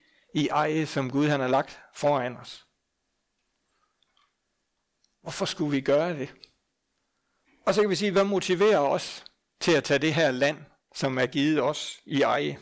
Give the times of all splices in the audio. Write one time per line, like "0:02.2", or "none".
0:07.4